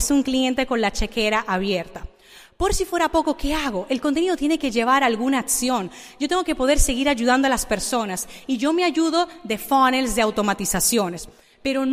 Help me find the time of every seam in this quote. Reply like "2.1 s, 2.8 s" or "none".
none